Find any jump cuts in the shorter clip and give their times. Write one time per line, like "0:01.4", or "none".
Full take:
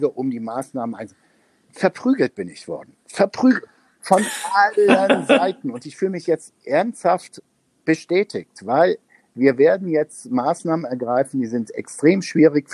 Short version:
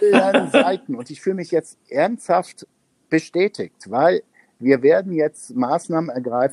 none